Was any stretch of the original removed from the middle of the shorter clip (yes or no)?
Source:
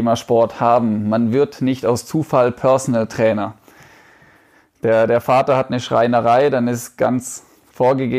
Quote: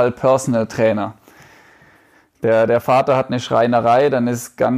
no